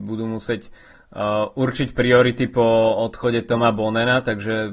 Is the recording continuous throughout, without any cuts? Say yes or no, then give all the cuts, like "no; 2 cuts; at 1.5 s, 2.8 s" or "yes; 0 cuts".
yes; 0 cuts